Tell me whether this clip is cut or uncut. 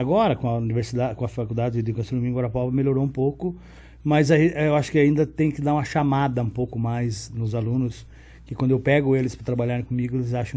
uncut